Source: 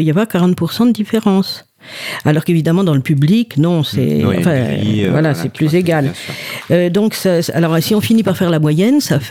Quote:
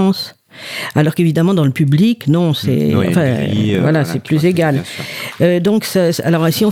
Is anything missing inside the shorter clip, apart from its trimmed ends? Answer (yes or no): no